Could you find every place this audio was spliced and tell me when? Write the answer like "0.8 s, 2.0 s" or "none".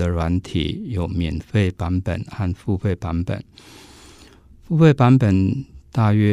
none